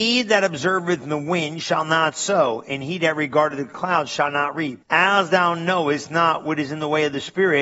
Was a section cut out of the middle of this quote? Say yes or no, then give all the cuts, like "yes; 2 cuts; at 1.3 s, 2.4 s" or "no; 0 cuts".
yes; 1 cut; at 4.8 s